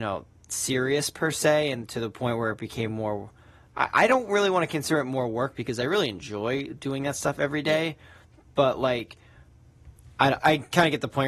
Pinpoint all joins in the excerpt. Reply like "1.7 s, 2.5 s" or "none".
10.4 s